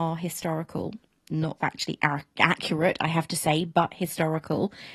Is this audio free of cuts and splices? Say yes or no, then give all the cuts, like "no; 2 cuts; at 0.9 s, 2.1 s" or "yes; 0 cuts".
no; 1 cut; at 1.6 s